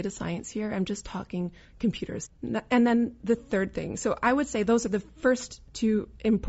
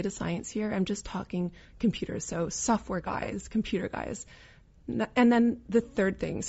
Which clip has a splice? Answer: first; 1 cut; at 2.3 s

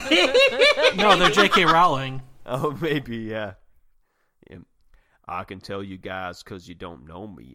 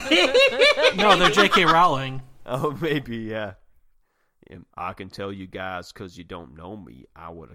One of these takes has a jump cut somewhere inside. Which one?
second; 1 cut; at 4.7 s

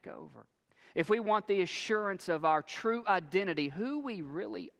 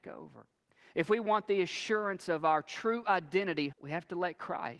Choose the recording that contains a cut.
second; 1 cut; at 3.7 s

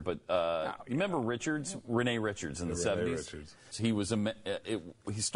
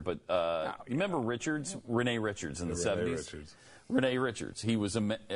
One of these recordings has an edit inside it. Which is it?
first; 1 cut; at 3.7 s

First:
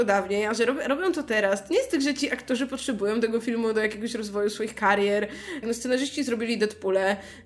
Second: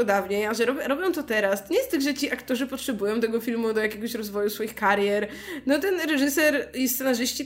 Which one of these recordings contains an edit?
first; 1 cut; at 5.6 s

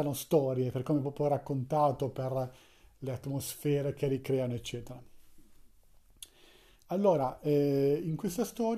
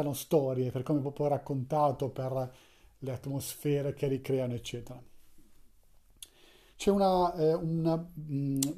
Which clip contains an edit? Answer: second; 1 cut; at 6.7 s

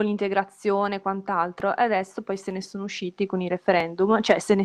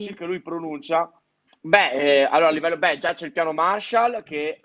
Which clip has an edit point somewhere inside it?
second; 1 cut; at 1.5 s

